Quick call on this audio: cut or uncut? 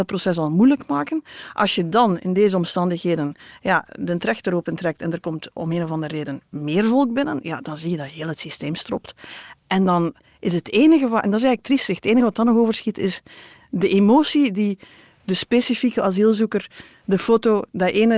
uncut